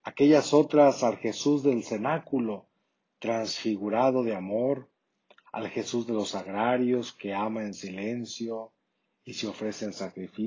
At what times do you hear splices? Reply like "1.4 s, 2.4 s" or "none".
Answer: none